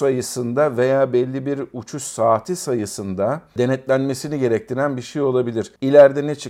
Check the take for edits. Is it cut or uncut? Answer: uncut